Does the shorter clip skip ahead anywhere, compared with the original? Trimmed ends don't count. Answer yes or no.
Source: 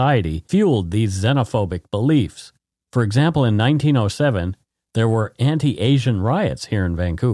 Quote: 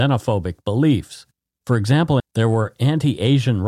yes